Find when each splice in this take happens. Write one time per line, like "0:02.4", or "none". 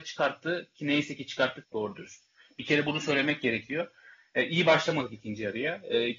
0:01.6